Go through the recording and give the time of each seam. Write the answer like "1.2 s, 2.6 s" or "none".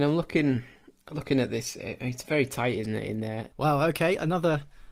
3.5 s